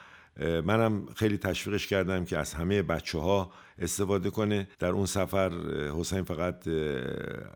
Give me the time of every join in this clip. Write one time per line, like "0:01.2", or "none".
0:04.7